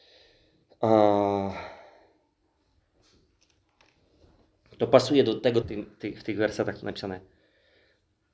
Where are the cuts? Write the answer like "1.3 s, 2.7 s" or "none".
5.6 s